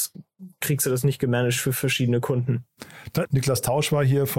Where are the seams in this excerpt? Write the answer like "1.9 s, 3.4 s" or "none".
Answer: 3.3 s